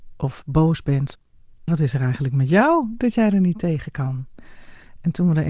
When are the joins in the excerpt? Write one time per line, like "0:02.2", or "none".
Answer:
0:01.7